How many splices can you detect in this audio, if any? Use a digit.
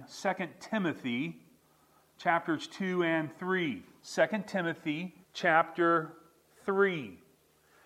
2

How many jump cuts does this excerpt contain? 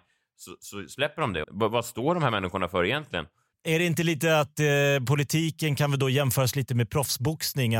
1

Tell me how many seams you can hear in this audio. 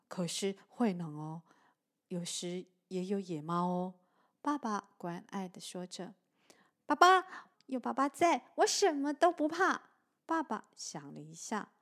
2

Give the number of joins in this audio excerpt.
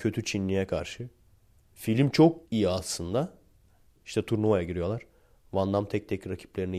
0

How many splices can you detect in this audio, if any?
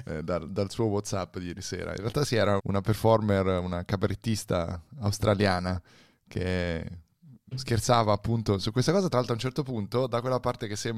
1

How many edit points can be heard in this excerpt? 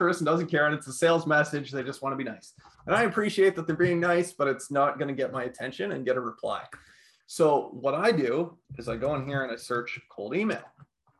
2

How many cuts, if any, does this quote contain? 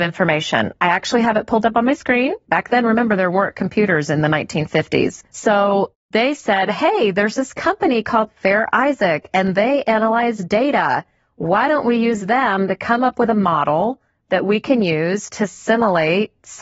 2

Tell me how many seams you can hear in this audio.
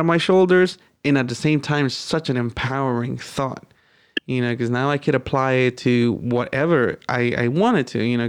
0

